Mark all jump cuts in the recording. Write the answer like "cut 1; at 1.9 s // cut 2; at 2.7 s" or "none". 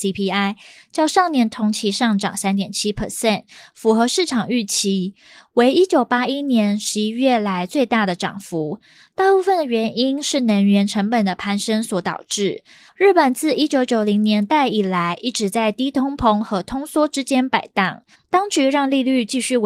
cut 1; at 12.9 s // cut 2; at 18.1 s

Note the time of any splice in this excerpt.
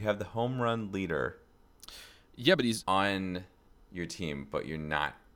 none

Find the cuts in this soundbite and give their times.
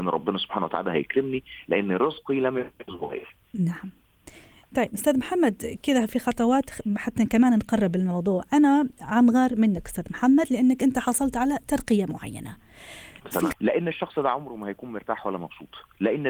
cut 1; at 13.5 s

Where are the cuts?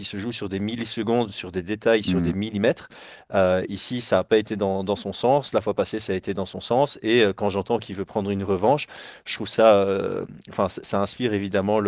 none

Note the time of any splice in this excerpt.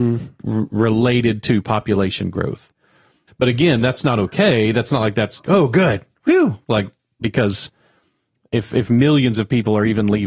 cut 1; at 3.3 s // cut 2; at 5.4 s

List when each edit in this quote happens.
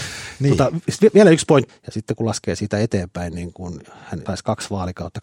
cut 1; at 1.7 s // cut 2; at 4.3 s

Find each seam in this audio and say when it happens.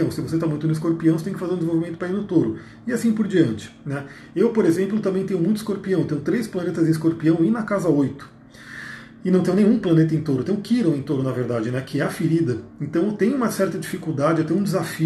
none

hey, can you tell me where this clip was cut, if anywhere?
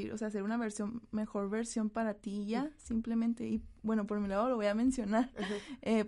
none

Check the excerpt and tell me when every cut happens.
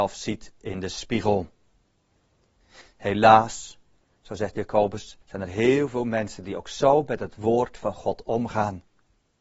cut 1; at 2.8 s // cut 2; at 5.2 s

